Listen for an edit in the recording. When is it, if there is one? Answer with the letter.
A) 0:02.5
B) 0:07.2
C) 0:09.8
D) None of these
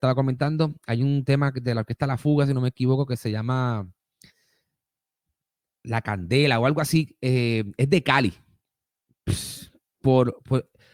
D